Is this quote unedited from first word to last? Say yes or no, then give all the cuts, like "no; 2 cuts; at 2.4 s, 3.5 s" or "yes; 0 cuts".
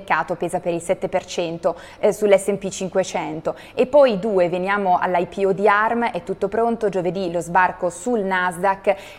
yes; 0 cuts